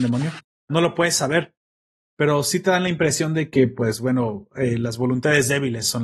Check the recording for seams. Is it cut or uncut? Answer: uncut